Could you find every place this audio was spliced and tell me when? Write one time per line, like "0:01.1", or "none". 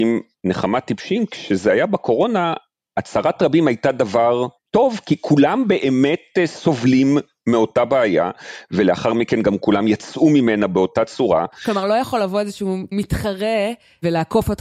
none